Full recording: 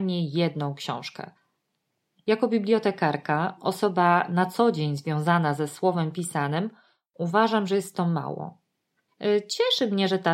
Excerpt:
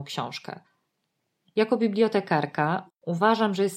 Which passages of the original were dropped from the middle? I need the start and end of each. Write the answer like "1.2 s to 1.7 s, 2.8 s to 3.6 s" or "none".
3.6 s to 7.0 s